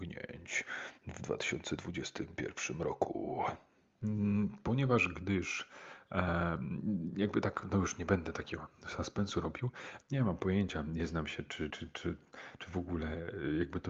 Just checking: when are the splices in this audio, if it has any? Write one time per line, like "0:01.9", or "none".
0:10.0
0:11.7